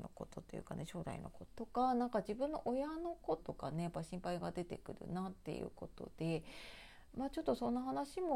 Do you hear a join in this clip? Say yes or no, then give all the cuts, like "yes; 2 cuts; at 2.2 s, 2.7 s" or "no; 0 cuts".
yes; 2 cuts; at 1.5 s, 3.4 s